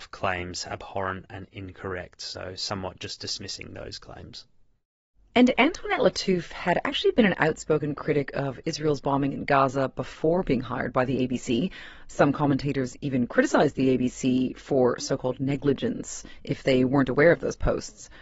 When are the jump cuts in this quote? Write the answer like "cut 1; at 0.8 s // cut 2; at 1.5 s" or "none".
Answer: none